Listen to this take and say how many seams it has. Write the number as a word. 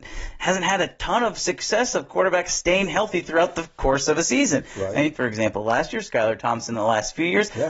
one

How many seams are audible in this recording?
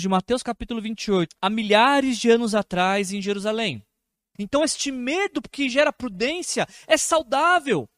two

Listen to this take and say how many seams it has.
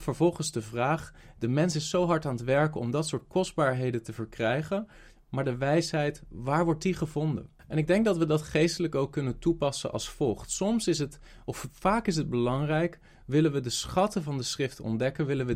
zero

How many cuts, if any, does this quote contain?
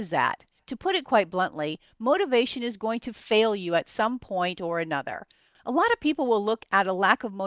zero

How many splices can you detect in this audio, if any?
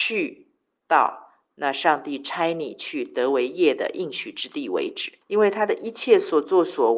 one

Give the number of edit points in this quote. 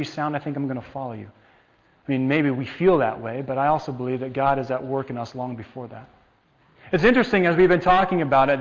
zero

